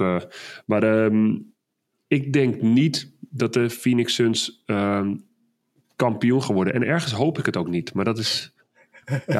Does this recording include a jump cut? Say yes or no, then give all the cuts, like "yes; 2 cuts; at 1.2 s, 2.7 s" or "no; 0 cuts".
no; 0 cuts